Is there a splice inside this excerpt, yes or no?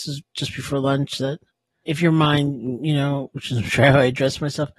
no